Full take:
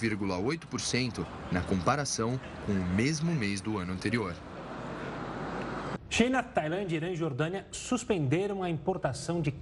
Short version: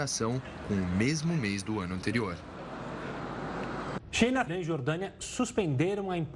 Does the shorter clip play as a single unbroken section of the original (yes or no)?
no